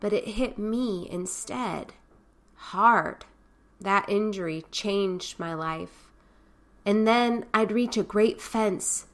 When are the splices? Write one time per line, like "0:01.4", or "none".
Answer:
0:03.7
0:06.8